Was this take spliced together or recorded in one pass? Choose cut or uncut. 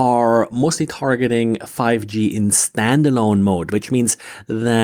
uncut